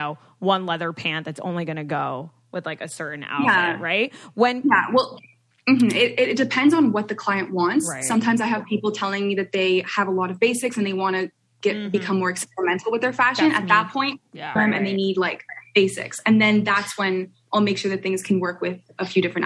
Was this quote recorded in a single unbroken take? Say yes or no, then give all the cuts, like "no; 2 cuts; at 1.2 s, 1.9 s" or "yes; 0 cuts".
no; 1 cut; at 14.6 s